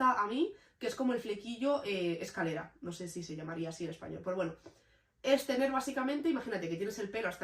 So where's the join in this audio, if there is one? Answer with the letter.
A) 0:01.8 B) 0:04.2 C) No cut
C